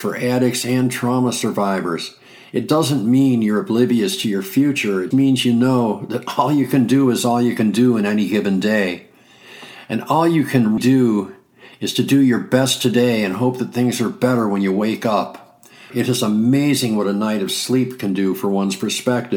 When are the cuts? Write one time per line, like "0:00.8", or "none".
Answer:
0:05.1
0:10.8
0:15.9